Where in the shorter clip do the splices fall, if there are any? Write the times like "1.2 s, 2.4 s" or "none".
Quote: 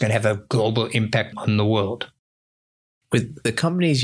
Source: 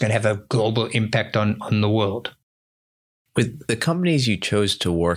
1.3 s